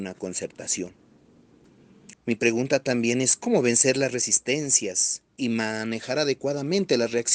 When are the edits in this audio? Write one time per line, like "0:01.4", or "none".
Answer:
0:02.1
0:05.3